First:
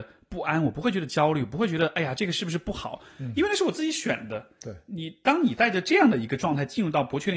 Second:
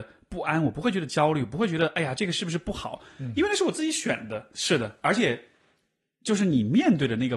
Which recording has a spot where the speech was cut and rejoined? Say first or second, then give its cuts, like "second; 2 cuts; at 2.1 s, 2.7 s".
second; 1 cut; at 4.5 s